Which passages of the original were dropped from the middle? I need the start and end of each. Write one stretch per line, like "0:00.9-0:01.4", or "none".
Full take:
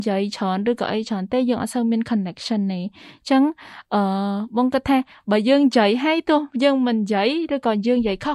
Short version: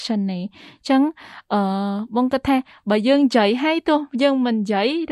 none

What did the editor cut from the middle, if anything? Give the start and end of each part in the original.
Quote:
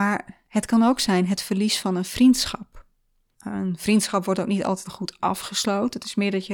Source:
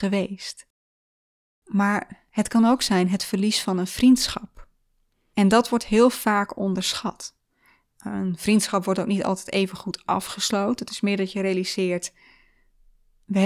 0:05.1-0:07.9
0:09.4-0:09.7

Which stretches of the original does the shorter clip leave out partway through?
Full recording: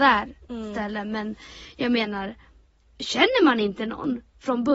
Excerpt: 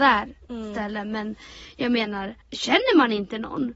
0:02.4-0:02.9

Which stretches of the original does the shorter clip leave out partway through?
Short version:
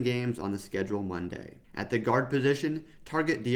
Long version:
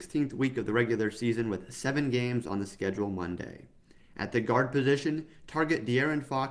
0:03.7-0:04.1

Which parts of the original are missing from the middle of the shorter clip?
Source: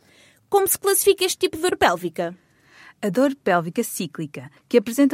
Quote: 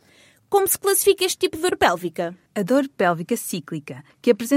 0:02.5-0:02.9

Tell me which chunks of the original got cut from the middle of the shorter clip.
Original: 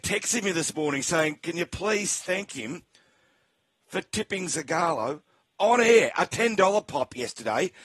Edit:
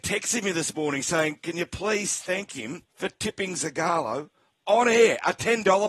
0:02.9-0:03.8

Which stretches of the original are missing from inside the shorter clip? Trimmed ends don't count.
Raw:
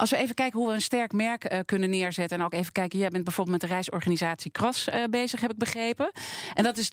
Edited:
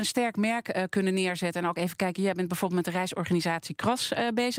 none

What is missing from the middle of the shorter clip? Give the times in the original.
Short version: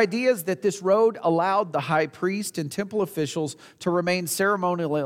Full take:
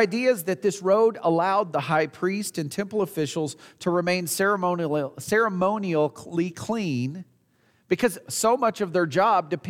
none

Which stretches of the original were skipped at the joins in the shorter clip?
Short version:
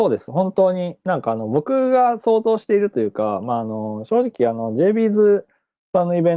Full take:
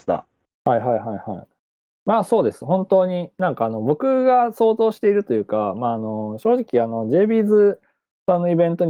none

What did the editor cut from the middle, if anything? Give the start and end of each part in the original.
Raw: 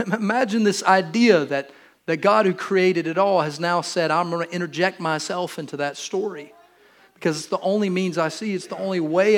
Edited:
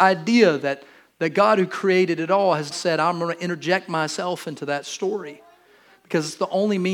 0:03.6-0:03.8

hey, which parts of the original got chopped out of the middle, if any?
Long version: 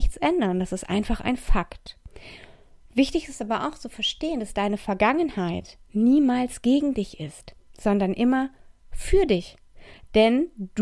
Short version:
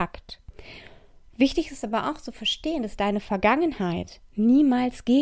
none

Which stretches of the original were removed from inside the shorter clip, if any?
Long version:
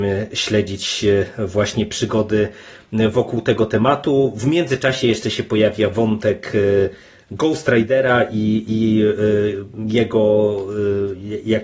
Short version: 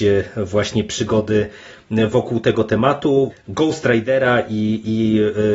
0:04.3-0:07.1

